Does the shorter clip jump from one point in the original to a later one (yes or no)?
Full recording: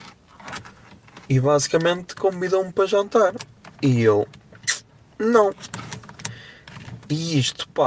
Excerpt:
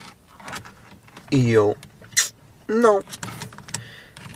yes